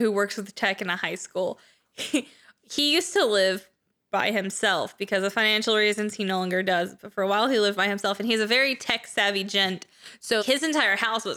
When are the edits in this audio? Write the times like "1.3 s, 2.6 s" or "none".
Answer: 10.4 s